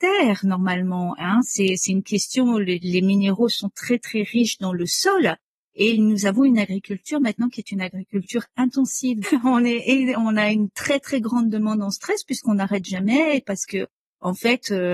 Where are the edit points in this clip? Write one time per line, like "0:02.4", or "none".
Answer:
0:09.2